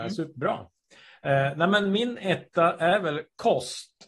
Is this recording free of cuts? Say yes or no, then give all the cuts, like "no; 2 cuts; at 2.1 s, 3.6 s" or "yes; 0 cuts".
yes; 0 cuts